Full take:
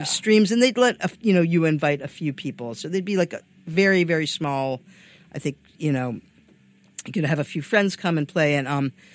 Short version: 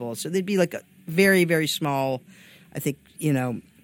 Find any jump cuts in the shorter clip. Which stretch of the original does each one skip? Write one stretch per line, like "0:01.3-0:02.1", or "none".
none